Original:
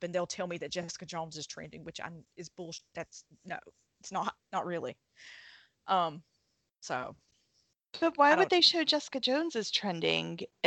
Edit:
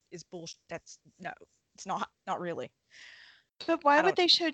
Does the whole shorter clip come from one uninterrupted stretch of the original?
no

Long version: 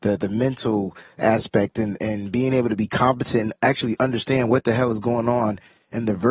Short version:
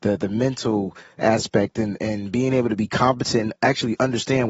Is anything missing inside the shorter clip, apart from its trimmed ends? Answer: no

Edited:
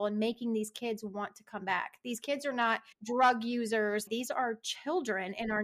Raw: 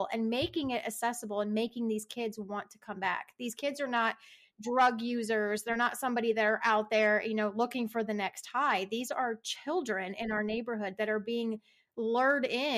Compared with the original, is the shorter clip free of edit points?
no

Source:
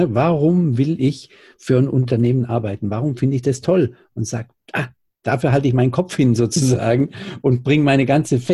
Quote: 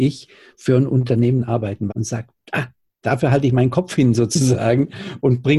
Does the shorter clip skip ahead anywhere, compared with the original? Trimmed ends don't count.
yes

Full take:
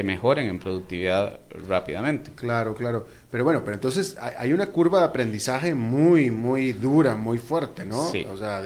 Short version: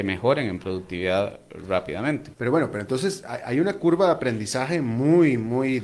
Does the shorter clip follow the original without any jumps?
no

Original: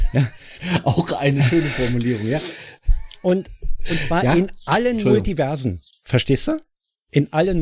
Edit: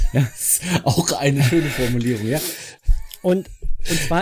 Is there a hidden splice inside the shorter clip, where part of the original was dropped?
no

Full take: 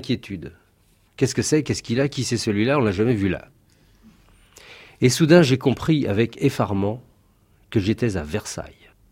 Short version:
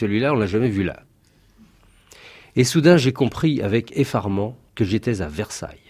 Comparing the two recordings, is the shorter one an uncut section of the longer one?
no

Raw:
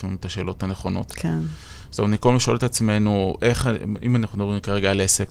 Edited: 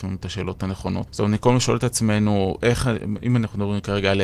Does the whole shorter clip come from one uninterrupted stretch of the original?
no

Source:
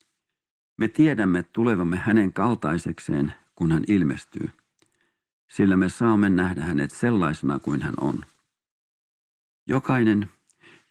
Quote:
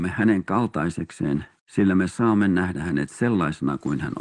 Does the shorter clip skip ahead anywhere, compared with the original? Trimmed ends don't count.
yes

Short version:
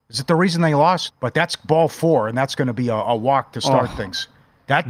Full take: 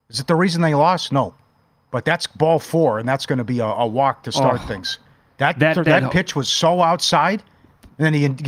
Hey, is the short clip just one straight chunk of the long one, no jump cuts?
no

